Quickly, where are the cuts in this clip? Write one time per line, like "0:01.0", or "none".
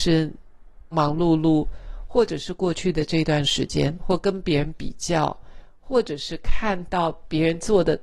0:00.9
0:04.0